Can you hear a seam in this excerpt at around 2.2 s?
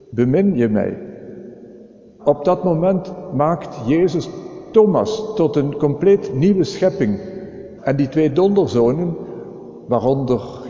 yes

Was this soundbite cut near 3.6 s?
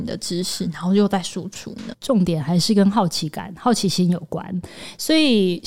no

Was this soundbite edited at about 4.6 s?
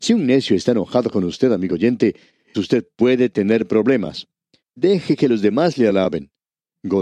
yes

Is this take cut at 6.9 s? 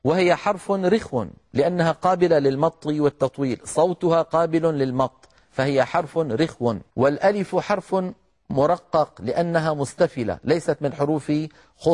yes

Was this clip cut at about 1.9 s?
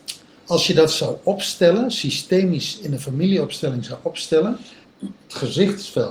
no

